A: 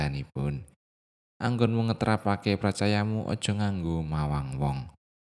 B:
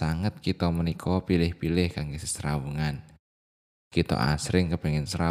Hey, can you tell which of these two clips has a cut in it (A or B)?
A